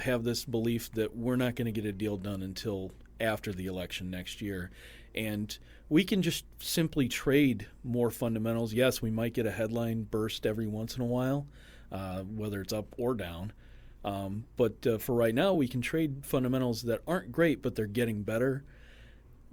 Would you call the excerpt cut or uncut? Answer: uncut